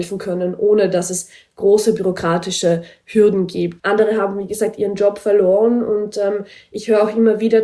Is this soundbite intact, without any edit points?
no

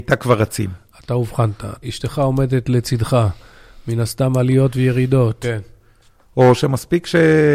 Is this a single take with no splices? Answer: no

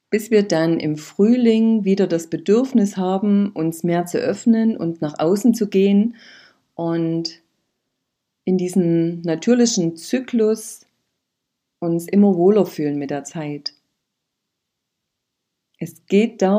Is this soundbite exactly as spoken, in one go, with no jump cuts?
yes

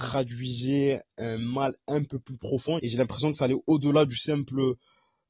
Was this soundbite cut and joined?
yes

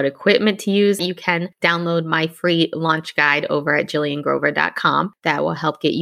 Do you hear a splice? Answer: yes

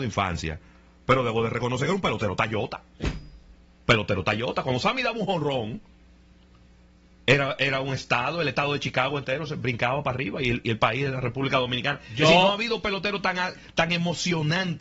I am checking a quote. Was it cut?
no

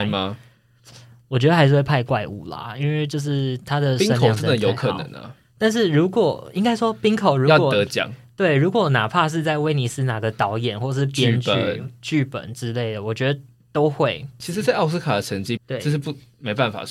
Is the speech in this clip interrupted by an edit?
yes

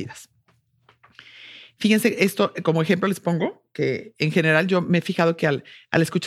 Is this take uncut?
yes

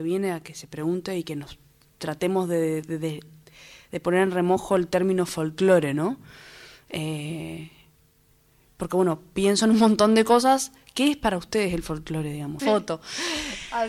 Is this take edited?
yes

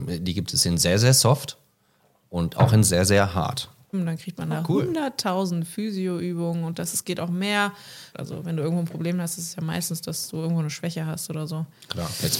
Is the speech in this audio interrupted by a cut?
yes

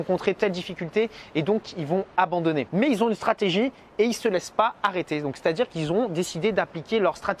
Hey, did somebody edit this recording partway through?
yes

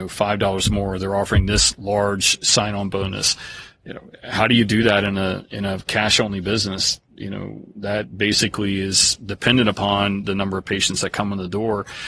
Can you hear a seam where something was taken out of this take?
no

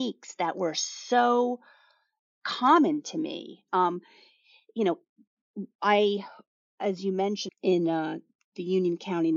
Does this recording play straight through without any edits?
no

